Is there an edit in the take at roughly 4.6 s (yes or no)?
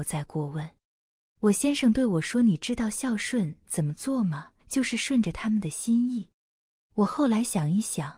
yes